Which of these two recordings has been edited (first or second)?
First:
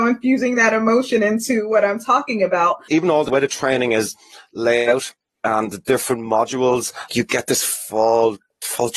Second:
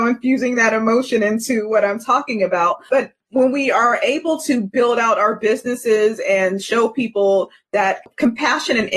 first